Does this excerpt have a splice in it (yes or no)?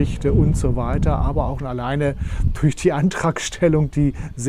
yes